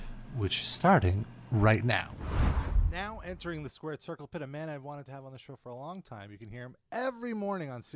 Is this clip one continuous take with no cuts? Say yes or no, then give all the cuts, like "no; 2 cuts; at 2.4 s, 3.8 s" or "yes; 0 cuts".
yes; 0 cuts